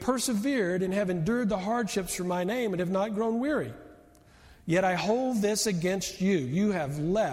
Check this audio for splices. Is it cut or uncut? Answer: uncut